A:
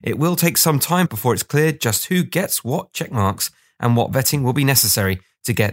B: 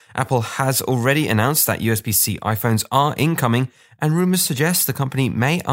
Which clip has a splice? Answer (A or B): A